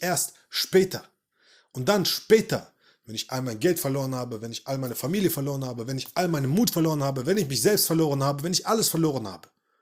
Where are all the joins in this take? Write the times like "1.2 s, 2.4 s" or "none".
none